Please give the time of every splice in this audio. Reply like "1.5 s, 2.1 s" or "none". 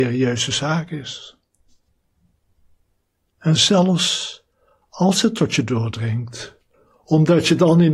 3.3 s